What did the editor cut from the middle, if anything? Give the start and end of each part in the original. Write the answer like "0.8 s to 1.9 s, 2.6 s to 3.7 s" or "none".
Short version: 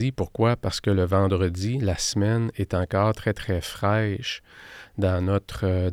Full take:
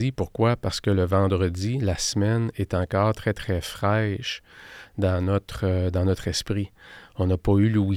none